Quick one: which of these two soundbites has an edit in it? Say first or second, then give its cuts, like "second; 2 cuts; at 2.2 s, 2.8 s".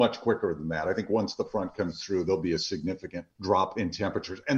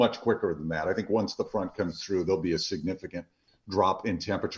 first; 1 cut; at 3.3 s